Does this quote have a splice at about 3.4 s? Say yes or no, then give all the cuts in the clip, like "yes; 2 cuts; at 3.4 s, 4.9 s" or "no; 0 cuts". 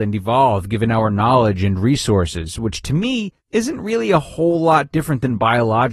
yes; 1 cut; at 3.4 s